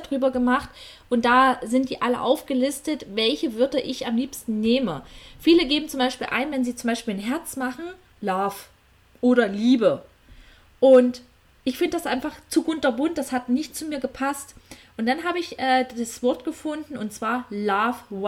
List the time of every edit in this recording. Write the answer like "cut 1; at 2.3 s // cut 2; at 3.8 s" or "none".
none

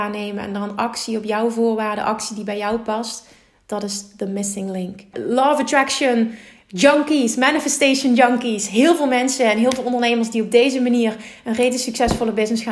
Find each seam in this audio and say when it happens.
cut 1; at 5.1 s

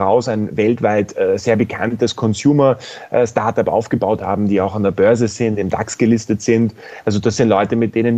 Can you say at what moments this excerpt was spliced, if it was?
none

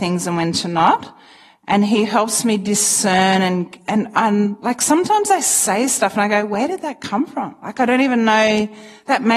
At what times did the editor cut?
none

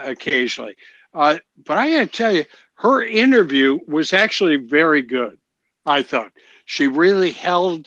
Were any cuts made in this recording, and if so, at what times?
none

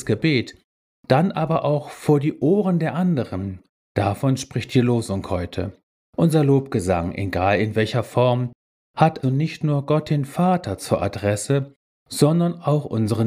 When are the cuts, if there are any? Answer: cut 1; at 6.1 s // cut 2; at 9.2 s

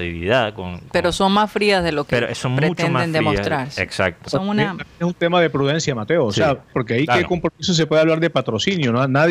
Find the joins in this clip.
cut 1; at 6.7 s

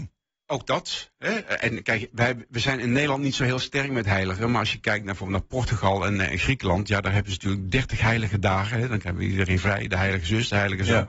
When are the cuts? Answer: none

